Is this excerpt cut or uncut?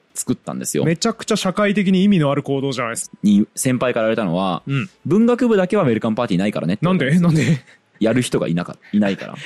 cut